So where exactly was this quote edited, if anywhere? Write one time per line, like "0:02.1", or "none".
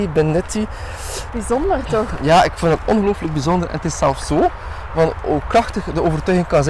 0:01.3